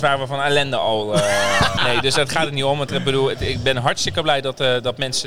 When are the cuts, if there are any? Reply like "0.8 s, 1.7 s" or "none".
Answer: 1.8 s